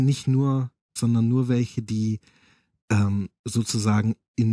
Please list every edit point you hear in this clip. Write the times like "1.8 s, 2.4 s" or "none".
1.0 s